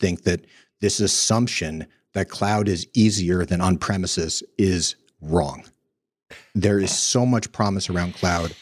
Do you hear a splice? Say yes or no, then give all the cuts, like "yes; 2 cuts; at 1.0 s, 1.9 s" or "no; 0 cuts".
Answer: no; 0 cuts